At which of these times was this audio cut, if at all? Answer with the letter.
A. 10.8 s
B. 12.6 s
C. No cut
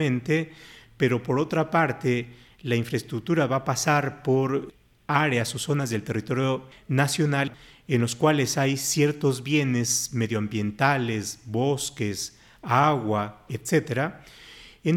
C